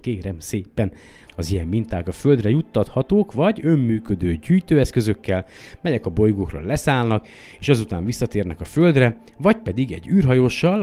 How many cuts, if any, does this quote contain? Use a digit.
1